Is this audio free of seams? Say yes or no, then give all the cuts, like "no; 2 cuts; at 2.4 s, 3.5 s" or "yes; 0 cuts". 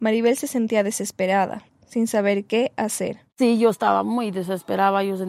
no; 2 cuts; at 1.7 s, 3.3 s